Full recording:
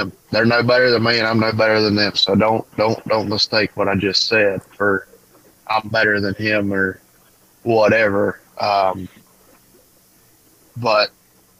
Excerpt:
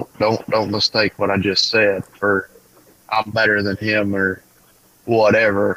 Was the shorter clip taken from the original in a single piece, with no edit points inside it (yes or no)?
yes